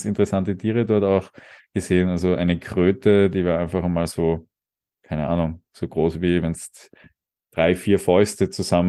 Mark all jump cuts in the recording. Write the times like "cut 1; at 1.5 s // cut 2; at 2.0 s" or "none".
none